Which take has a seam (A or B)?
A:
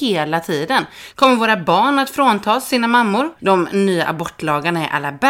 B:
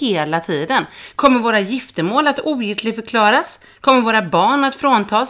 A